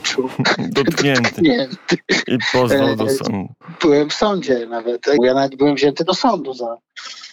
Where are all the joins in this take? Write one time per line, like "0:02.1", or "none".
0:05.2